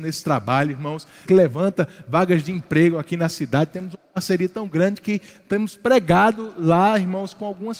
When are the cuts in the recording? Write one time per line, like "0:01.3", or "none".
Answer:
0:01.3